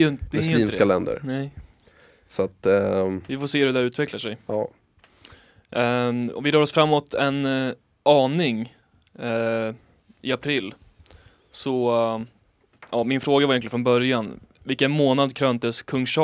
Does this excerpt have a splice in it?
no; 0 cuts

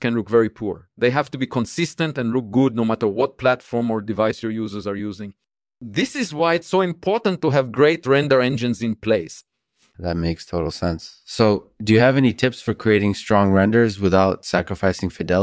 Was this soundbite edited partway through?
no; 0 cuts

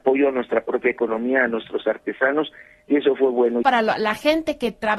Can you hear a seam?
yes; 1 cut; at 3.6 s

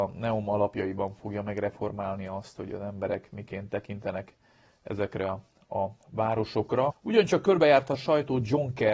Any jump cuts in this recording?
yes; 1 cut; at 6.9 s

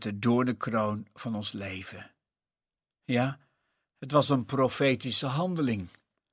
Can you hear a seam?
no; 0 cuts

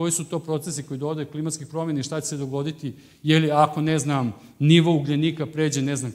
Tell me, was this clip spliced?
no; 0 cuts

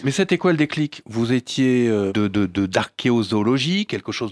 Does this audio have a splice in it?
yes; 1 cut; at 2.1 s

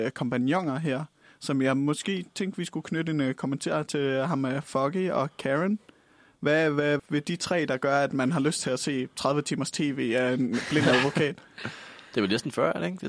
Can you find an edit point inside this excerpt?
yes; 1 cut; at 7.0 s

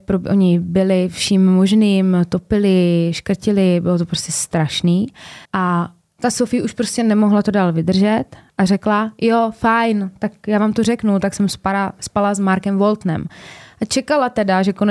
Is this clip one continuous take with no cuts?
no; 1 cut; at 5.4 s

